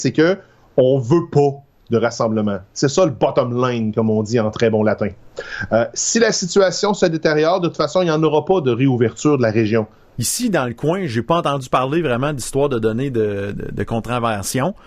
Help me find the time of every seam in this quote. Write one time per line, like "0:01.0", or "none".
0:10.1
0:13.5